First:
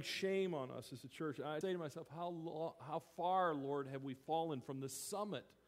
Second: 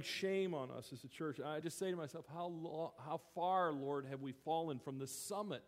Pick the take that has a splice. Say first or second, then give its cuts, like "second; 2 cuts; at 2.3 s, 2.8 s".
first; 1 cut; at 1.6 s